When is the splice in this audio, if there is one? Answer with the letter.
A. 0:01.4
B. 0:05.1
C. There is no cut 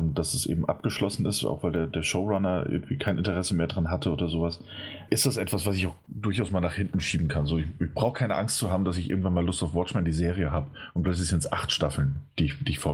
B